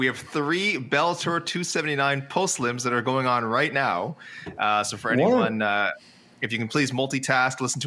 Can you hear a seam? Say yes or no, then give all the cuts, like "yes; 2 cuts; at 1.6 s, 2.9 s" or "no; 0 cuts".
no; 0 cuts